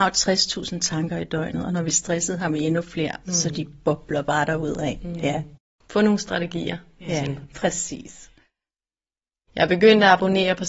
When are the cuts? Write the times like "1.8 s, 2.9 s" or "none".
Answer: 7.2 s, 9.5 s